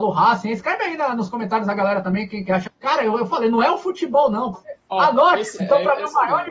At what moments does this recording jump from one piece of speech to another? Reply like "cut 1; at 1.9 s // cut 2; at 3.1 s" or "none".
cut 1; at 2.7 s // cut 2; at 4.5 s // cut 3; at 5.6 s